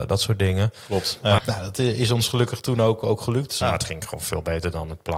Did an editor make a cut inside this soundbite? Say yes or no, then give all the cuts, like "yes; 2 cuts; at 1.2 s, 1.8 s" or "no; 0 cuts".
yes; 2 cuts; at 1.4 s, 3.6 s